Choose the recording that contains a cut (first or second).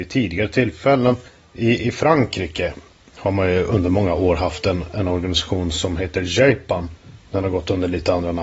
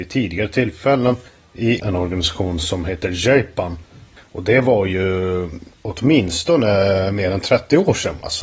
second